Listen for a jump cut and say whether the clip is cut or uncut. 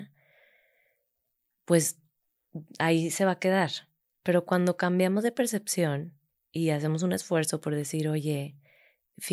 uncut